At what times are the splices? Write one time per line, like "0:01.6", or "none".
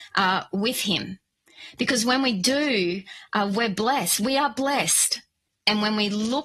0:05.5